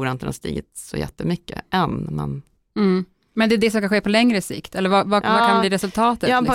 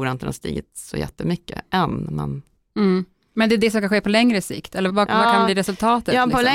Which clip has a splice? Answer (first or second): second